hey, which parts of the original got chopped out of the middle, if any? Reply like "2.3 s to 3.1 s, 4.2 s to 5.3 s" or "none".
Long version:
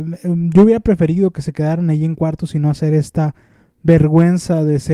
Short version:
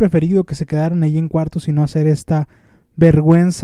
none